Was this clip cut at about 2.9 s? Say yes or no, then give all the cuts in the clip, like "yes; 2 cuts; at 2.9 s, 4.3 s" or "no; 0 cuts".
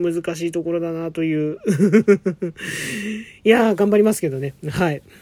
no; 0 cuts